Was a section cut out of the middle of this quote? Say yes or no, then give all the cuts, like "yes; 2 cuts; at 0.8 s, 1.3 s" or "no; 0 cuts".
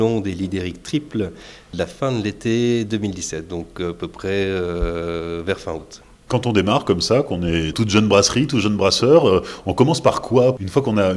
yes; 1 cut; at 7.7 s